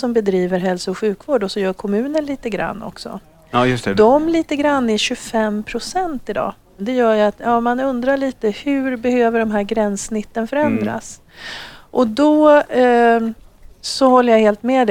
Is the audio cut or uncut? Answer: cut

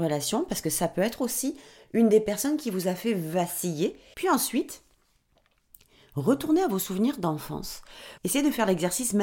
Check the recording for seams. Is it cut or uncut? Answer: cut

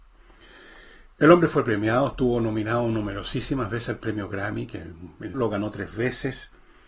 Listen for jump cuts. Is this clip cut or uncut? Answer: cut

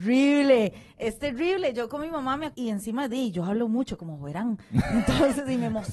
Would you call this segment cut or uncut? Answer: cut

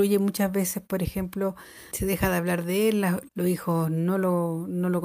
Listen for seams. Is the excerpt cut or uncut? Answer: cut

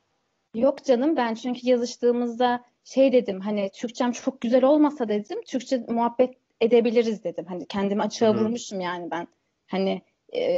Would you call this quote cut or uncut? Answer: uncut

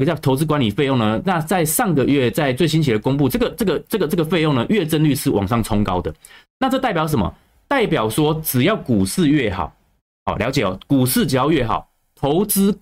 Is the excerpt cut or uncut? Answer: cut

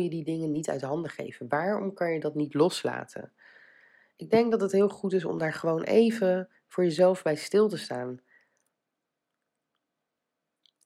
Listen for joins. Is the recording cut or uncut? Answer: uncut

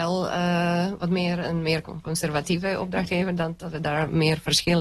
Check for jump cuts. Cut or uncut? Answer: uncut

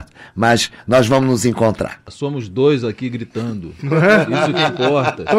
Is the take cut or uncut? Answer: uncut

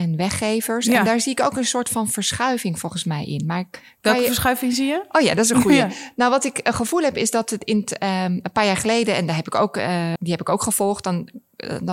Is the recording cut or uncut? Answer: cut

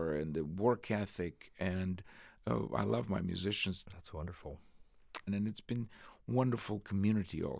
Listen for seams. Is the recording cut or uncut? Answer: cut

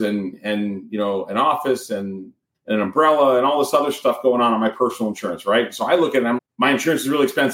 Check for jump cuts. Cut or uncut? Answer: cut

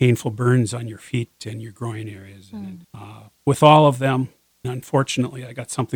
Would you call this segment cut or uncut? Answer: cut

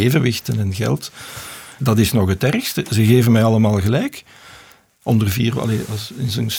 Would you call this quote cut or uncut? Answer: cut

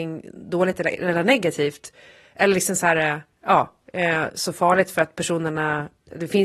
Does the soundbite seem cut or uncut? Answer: uncut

